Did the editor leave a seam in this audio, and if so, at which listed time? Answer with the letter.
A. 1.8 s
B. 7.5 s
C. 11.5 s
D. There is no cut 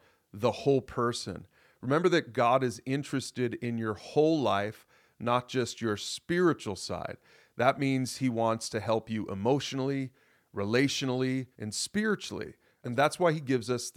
C